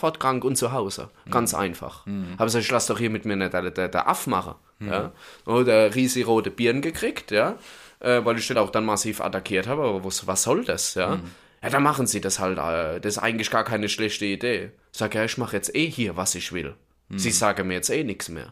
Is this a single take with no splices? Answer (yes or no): no